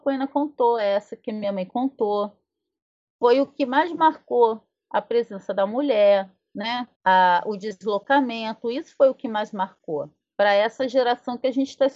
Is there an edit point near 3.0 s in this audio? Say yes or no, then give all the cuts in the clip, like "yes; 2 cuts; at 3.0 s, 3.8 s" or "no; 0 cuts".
no; 1 cut; at 6.9 s